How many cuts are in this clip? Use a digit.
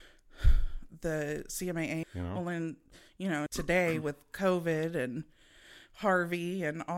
2